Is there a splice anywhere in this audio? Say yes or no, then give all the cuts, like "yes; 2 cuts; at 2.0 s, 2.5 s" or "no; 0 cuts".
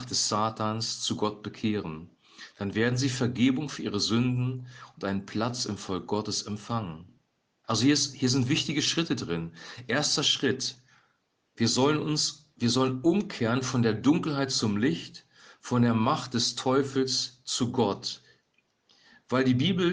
yes; 1 cut; at 7.6 s